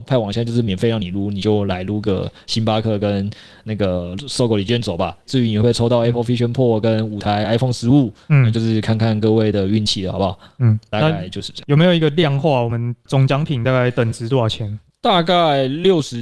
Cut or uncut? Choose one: uncut